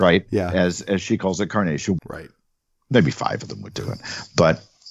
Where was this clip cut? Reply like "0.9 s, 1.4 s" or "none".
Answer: 2.0 s